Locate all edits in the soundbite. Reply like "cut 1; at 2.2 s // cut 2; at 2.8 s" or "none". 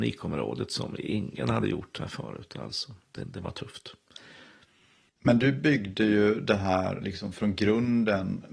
cut 1; at 3.2 s